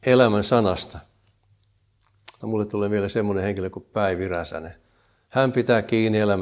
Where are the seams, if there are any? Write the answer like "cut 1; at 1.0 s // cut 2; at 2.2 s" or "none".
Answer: cut 1; at 2.4 s